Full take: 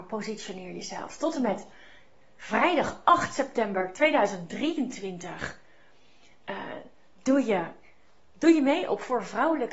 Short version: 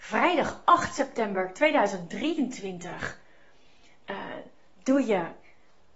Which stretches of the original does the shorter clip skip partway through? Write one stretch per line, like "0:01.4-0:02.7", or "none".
none